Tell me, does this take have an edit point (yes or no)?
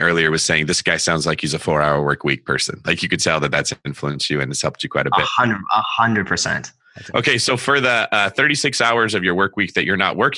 no